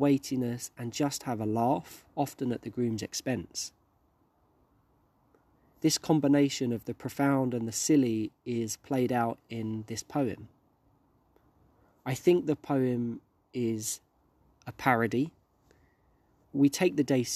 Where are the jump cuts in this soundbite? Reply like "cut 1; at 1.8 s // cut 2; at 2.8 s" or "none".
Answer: cut 1; at 16.4 s